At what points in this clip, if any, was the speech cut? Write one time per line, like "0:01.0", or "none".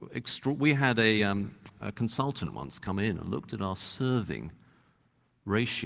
none